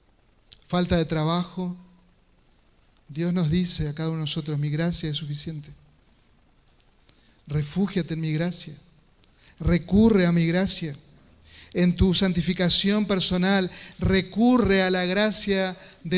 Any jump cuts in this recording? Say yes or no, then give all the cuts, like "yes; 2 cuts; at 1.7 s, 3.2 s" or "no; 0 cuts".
no; 0 cuts